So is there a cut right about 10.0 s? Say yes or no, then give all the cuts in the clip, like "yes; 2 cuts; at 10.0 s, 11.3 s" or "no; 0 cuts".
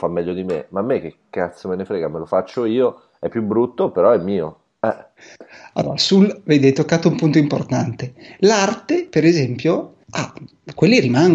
yes; 1 cut; at 10.0 s